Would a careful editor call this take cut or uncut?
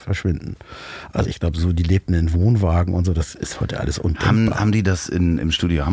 cut